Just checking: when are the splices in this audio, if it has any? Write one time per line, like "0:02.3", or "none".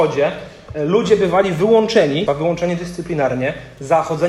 0:02.3